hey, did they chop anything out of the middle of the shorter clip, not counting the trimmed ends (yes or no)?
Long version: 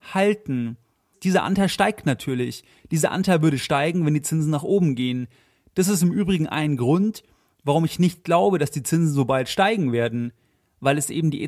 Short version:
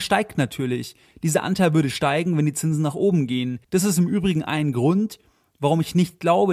yes